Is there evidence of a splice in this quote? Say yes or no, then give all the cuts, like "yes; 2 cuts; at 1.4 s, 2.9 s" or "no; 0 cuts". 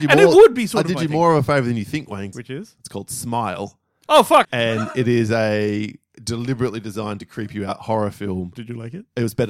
yes; 3 cuts; at 2.3 s, 4.4 s, 8.5 s